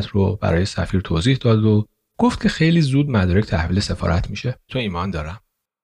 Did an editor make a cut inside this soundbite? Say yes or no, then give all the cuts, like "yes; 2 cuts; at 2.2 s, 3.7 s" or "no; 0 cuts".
yes; 1 cut; at 4.7 s